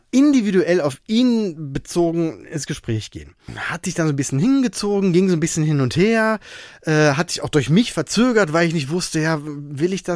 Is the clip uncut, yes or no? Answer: yes